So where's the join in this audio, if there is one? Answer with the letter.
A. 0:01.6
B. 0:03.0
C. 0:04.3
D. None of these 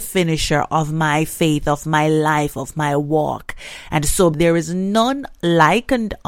C